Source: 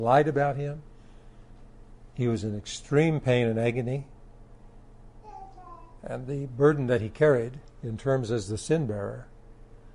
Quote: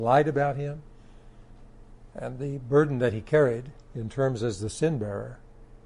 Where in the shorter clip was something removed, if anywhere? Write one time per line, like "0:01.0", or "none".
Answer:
0:02.1